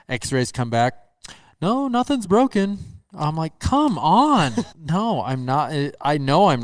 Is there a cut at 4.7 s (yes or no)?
yes